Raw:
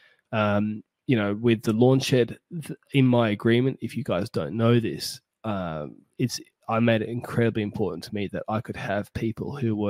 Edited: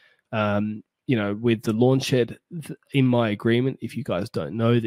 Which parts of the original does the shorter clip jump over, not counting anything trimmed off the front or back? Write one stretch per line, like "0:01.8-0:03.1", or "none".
none